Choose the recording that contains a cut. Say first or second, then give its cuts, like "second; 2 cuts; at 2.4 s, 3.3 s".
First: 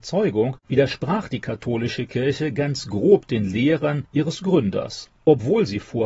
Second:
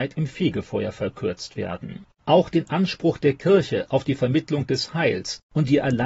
second; 1 cut; at 2.2 s